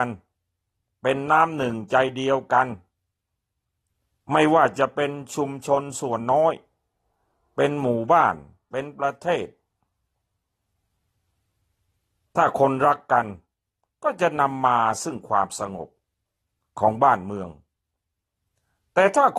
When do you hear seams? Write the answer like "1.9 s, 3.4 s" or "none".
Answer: none